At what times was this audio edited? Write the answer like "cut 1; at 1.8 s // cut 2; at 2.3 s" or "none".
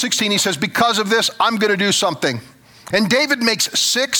cut 1; at 2.9 s

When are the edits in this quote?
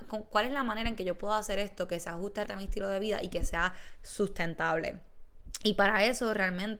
cut 1; at 2.5 s

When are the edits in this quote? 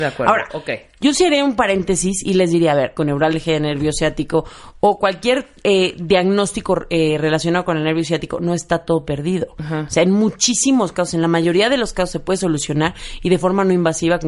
cut 1; at 3.0 s

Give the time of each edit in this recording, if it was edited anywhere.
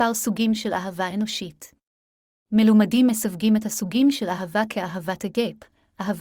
cut 1; at 2.5 s

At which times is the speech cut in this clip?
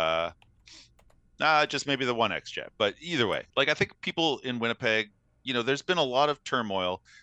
cut 1; at 3.5 s

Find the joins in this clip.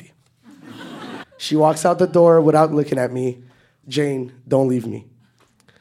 cut 1; at 1.2 s // cut 2; at 3.8 s

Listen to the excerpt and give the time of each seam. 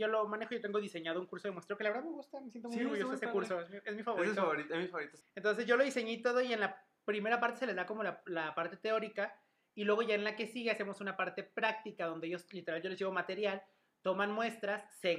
cut 1; at 5.2 s

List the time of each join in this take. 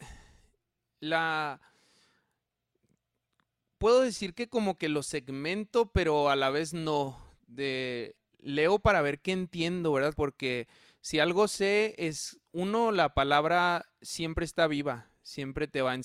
cut 1; at 10.2 s

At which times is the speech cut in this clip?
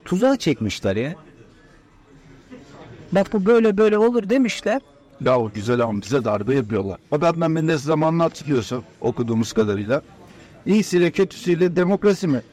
none

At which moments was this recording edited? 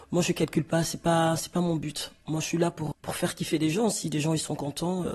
cut 1; at 2.9 s

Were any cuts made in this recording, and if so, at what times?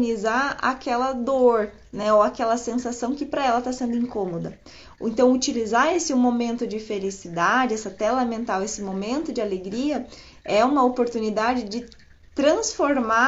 none

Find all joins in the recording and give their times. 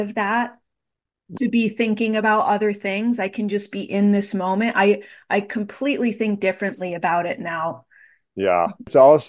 cut 1; at 1.3 s

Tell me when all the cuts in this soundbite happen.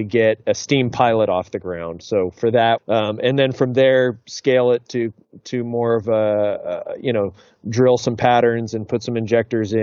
cut 1; at 2.8 s

